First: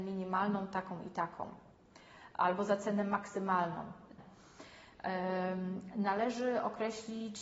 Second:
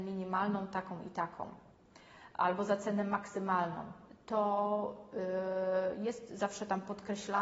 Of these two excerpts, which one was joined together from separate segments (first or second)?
first